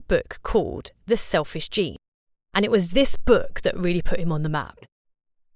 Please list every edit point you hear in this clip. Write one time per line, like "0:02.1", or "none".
none